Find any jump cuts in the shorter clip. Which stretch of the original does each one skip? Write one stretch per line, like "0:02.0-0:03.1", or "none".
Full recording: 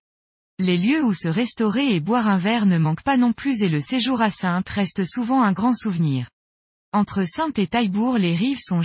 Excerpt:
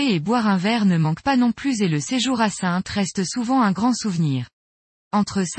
none

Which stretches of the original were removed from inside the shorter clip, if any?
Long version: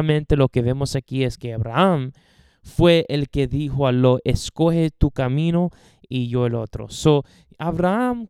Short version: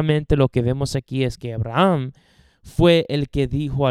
none

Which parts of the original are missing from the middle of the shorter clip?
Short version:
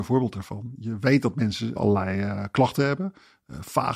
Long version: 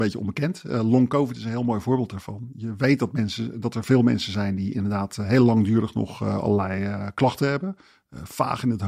0:03.5-0:06.4

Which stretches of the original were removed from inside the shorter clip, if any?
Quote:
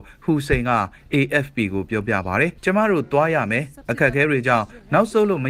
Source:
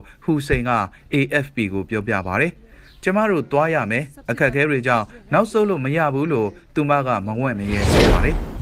0:02.6-0:03.0

